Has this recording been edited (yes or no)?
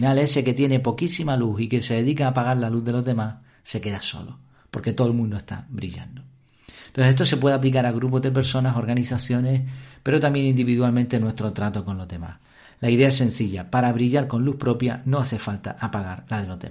no